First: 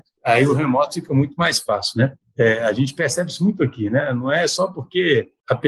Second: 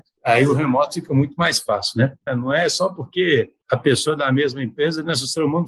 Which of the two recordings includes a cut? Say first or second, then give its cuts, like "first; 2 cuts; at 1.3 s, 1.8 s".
second; 1 cut; at 2.3 s